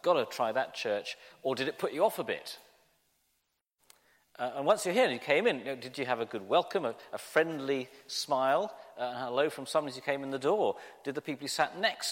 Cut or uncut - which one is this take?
uncut